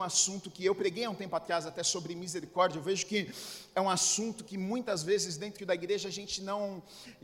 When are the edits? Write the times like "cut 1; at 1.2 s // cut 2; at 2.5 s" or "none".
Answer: none